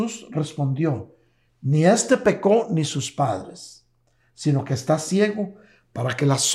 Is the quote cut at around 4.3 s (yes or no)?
no